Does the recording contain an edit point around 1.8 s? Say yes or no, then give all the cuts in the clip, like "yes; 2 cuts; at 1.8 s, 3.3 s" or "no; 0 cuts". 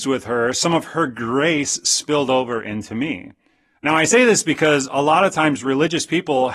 no; 1 cut; at 3.7 s